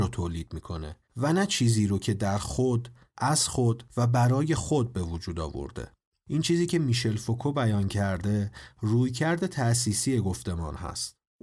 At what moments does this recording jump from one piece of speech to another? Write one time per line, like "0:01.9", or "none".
none